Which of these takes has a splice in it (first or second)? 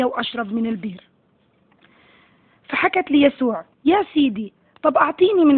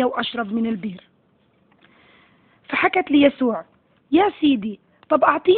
first